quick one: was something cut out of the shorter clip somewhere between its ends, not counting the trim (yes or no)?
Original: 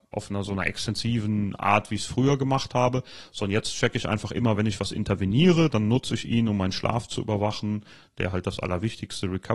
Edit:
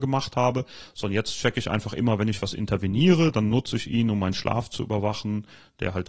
no